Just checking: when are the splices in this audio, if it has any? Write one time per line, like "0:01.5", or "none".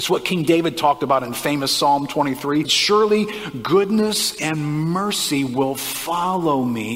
0:02.6